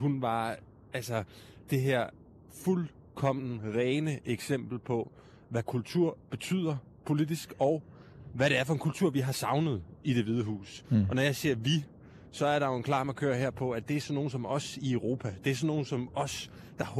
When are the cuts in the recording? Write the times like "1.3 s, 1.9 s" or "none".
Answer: none